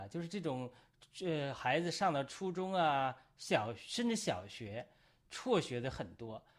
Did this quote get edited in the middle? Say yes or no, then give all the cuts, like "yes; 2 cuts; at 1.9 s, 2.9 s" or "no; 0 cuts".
no; 0 cuts